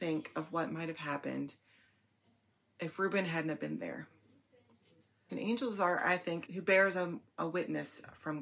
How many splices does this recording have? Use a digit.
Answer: 2